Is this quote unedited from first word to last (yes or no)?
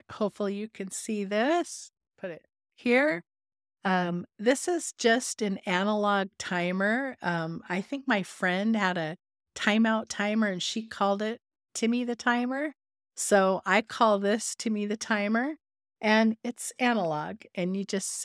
yes